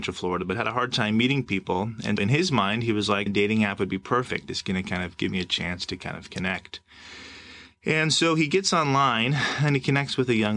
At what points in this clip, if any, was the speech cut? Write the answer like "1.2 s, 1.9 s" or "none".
2.2 s, 3.3 s